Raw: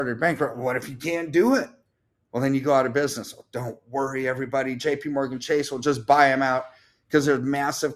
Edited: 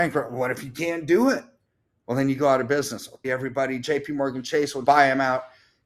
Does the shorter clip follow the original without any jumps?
no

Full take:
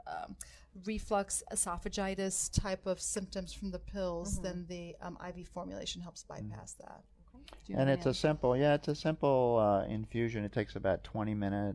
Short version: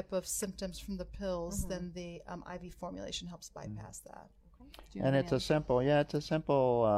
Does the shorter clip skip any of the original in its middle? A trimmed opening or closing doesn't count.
no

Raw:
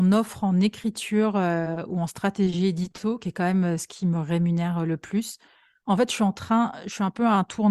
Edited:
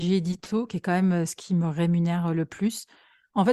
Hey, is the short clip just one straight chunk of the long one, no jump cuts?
yes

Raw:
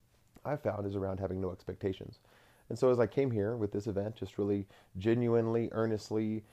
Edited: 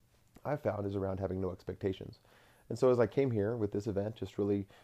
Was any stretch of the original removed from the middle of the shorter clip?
no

